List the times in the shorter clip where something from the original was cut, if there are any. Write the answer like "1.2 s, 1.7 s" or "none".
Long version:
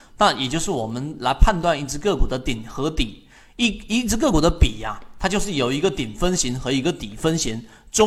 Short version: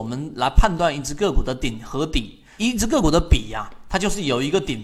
2.6 s